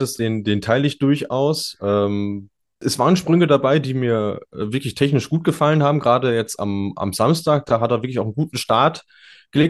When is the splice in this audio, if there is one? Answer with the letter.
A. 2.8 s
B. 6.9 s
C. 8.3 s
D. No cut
A